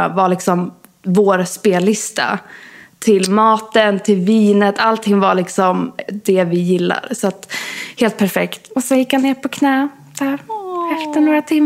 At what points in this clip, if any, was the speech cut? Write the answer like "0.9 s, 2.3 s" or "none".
none